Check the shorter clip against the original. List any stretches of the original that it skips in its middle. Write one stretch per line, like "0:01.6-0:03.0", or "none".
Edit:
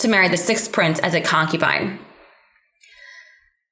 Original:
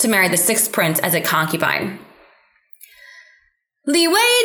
none